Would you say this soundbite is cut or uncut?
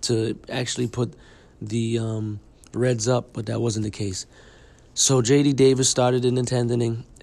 uncut